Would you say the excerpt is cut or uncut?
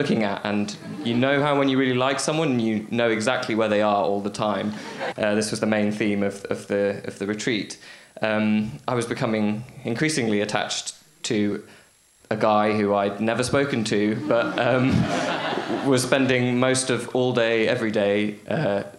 cut